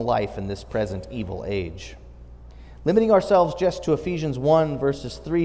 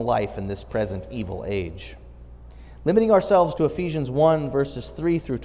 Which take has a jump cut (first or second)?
second